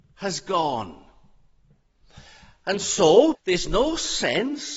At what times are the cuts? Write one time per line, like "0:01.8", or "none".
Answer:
0:03.3